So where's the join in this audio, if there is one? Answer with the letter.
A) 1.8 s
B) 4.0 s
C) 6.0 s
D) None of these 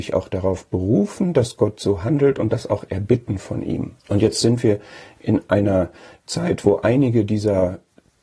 B